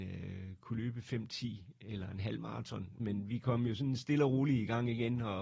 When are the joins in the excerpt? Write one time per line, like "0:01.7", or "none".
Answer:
0:03.0